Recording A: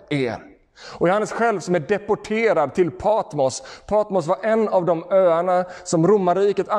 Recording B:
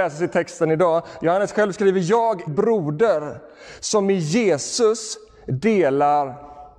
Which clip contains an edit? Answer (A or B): B